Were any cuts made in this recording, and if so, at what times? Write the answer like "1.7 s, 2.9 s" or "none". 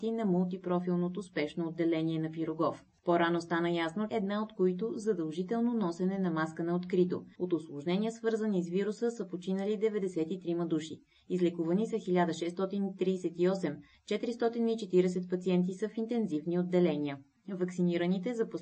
4.1 s, 7.4 s